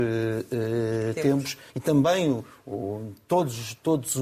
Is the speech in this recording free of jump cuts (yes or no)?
no